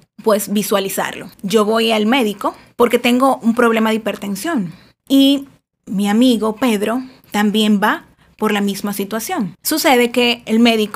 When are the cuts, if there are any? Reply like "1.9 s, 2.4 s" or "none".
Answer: 1.3 s, 9.5 s